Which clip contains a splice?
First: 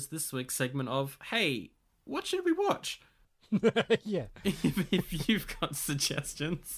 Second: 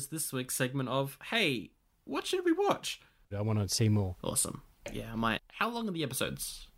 second; 2 cuts; at 3.3 s, 5.4 s

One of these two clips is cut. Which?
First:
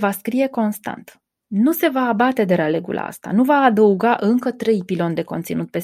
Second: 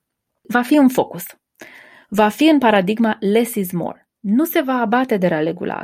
second; 1 cut; at 4.1 s

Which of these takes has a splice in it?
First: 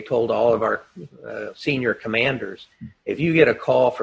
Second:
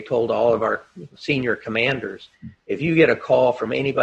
second; 1 cut; at 1.2 s

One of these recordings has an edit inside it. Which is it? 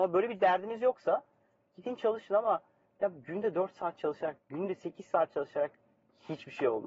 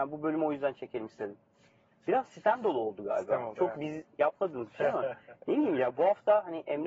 first; 1 cut; at 4.4 s

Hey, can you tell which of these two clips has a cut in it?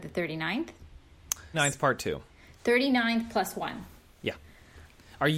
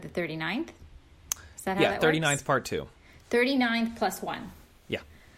first; 1 cut; at 1.5 s

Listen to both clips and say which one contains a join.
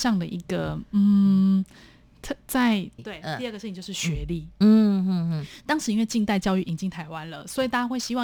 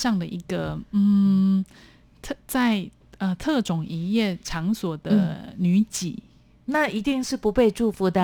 first; 1 cut; at 3.0 s

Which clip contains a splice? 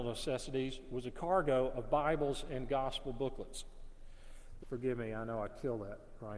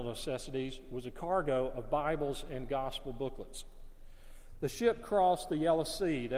first; 1 cut; at 4.6 s

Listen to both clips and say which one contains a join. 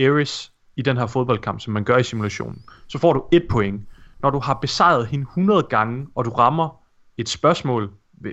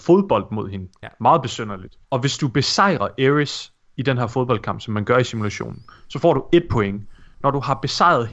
second; 1 cut; at 2.0 s

